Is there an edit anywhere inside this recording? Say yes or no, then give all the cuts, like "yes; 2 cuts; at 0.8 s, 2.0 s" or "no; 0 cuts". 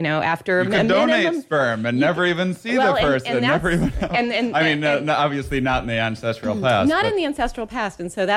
no; 0 cuts